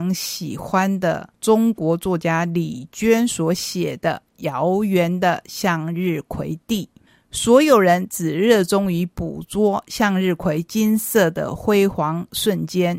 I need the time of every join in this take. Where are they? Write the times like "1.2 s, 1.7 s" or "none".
none